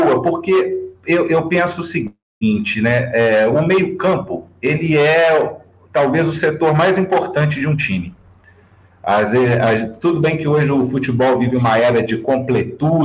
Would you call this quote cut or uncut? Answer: uncut